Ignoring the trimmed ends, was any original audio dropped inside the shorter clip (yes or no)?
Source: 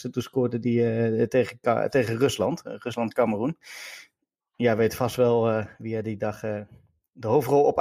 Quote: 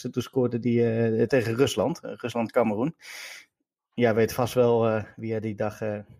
yes